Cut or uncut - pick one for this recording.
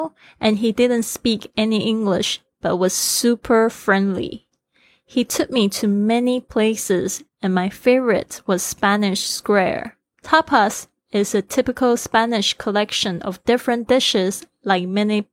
cut